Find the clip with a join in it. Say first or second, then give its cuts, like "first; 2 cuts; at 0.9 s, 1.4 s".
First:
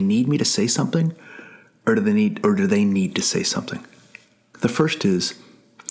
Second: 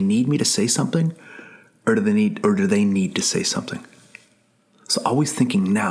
first; 1 cut; at 4.5 s